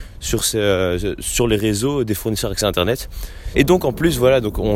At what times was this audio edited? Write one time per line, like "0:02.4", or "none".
0:03.5

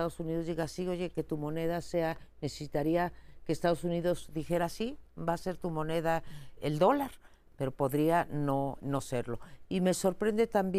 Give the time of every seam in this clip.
0:06.6
0:08.8

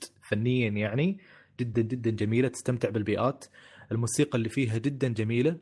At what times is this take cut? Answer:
0:01.7

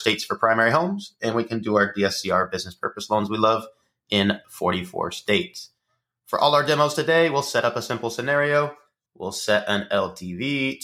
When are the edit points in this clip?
0:09.1

